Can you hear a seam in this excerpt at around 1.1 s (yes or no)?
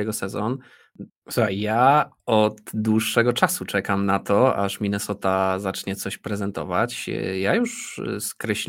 yes